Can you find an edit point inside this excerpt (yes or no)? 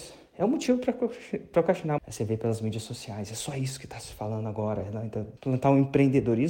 yes